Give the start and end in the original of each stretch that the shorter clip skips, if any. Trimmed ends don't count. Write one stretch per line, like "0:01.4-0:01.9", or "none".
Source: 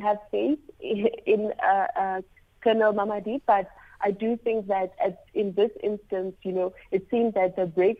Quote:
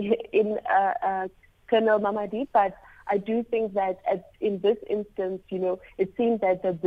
none